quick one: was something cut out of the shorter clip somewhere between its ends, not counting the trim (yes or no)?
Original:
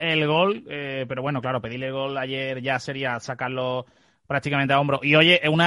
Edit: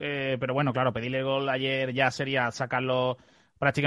no